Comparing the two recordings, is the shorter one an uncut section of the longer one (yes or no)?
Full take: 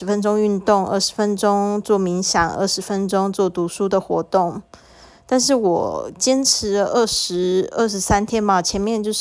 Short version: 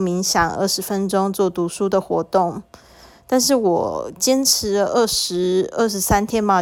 yes